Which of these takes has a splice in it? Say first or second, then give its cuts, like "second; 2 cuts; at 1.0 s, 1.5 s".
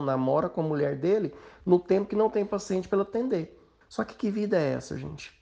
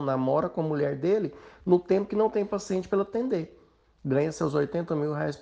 first; 1 cut; at 3.8 s